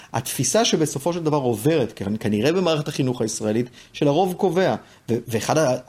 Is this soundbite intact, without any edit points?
yes; 0 cuts

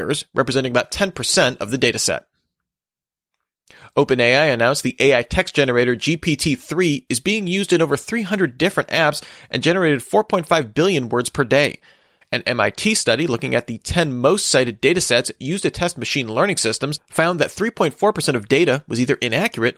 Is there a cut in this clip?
yes; 1 cut; at 12.2 s

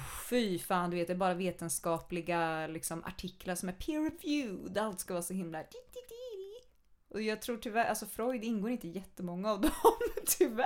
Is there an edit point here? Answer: no; 0 cuts

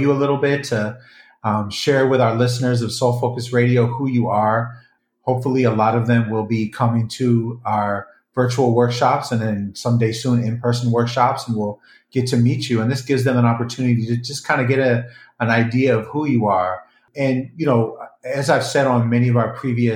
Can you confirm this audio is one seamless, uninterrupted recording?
yes; 0 cuts

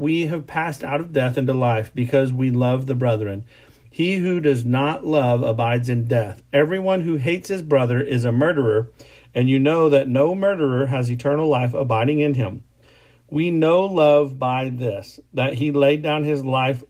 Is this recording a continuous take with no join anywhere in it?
yes; 0 cuts

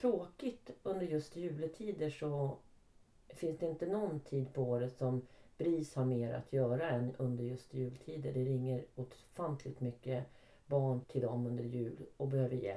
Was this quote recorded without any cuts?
no; 1 cut; at 11.0 s

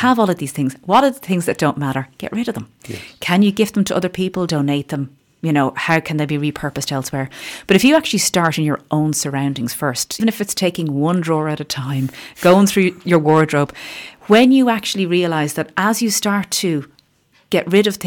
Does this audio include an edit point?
yes; 1 cut; at 10.2 s

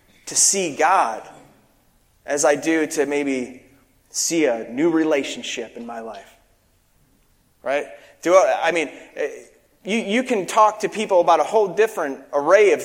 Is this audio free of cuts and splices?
yes; 0 cuts

